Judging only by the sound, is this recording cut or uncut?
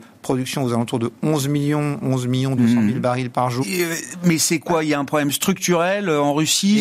cut